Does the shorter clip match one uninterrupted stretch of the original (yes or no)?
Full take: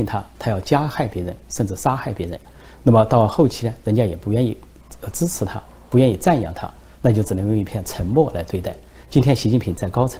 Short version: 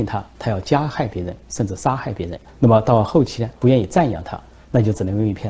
no